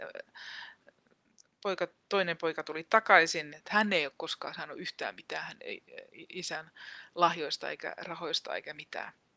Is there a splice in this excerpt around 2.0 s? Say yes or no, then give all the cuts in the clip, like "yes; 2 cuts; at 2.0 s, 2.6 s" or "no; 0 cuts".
no; 1 cut; at 3.5 s